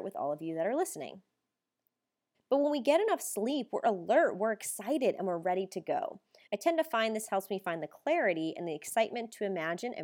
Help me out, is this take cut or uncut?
cut